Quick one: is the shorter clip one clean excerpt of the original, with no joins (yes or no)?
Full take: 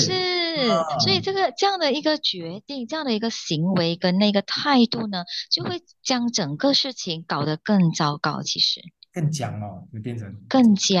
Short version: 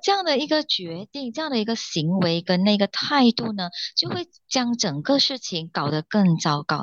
yes